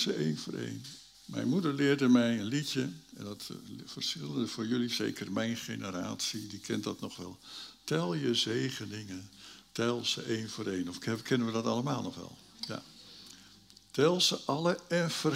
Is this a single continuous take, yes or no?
no